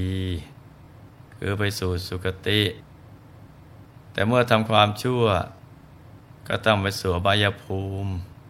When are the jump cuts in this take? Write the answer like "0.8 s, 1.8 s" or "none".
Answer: none